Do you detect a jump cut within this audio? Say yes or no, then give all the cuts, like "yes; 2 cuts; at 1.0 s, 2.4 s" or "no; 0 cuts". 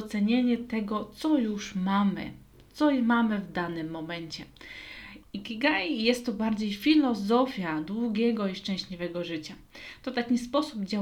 yes; 1 cut; at 5.2 s